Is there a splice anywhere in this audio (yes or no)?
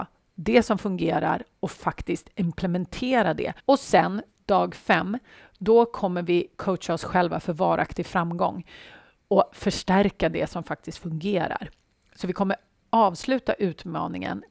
yes